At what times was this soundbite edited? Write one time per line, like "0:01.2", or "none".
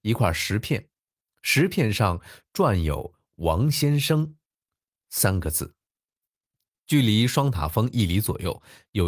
0:06.7